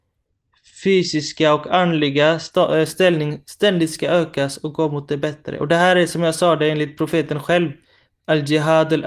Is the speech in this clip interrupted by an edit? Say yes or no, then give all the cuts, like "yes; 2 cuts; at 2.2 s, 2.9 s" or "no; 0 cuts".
no; 0 cuts